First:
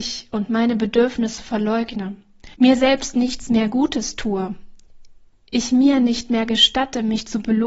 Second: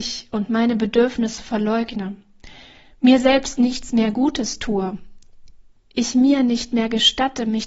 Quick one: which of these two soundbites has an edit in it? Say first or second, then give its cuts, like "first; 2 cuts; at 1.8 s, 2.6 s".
first; 1 cut; at 2.5 s